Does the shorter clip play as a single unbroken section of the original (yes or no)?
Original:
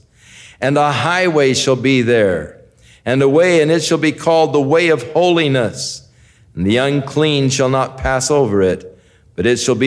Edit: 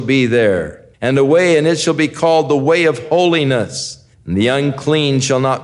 no